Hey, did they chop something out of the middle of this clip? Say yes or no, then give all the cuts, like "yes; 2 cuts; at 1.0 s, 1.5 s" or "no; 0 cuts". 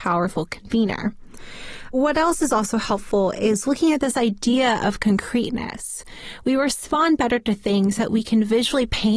no; 0 cuts